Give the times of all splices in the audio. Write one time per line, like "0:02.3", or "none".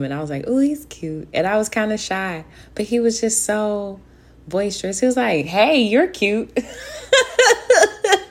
none